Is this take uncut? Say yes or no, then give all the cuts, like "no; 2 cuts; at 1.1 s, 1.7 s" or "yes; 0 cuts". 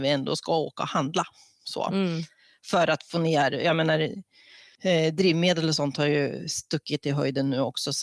yes; 0 cuts